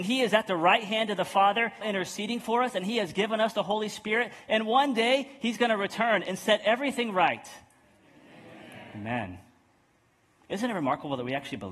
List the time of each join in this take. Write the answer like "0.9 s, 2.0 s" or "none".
1.8 s